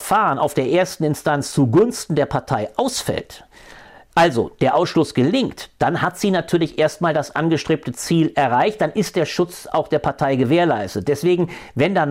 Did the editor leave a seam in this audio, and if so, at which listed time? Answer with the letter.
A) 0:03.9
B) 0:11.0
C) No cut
C